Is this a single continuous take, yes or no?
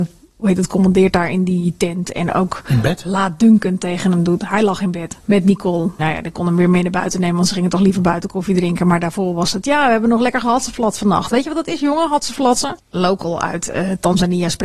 no